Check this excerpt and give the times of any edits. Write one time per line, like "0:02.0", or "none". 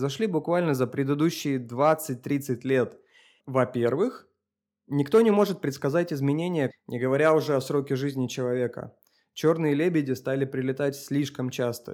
0:03.4
0:06.7